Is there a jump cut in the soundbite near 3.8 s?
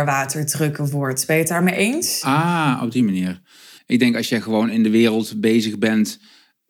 yes; 1 cut; at 3.8 s

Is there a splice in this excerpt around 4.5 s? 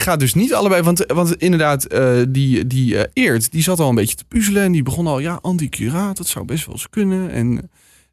no; 0 cuts

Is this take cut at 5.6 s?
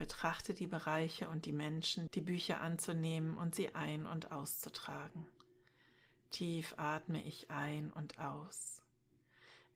no; 1 cut; at 2.1 s

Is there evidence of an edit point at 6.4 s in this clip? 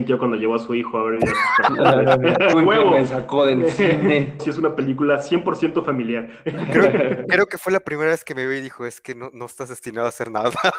no; 2 cuts; at 2.5 s, 4.4 s

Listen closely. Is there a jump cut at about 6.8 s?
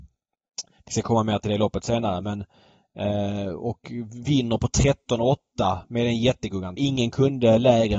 yes; 1 cut; at 6.8 s

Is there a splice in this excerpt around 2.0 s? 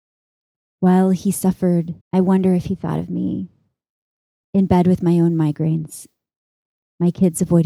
yes; 1 cut; at 2.0 s

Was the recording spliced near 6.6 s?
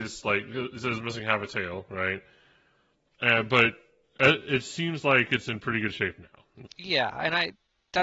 yes; 2 cuts; at 3.1 s, 6.6 s

